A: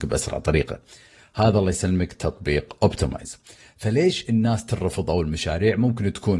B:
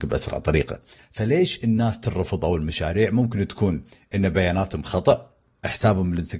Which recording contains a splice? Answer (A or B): B